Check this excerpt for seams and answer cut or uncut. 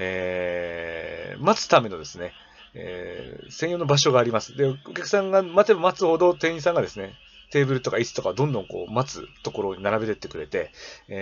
uncut